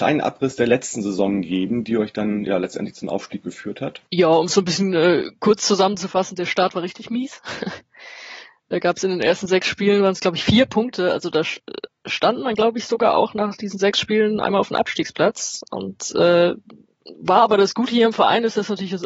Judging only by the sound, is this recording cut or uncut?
cut